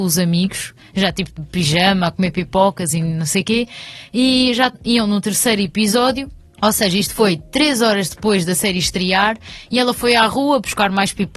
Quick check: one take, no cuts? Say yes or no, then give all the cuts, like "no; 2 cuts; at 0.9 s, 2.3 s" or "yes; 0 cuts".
yes; 0 cuts